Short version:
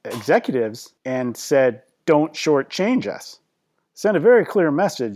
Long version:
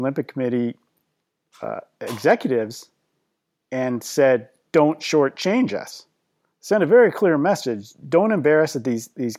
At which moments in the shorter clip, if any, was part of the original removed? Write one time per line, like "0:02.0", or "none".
0:01.0